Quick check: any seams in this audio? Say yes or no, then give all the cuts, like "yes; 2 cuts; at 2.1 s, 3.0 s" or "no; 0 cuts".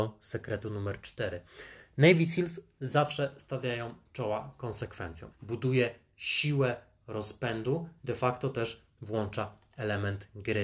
yes; 2 cuts; at 5.3 s, 8.0 s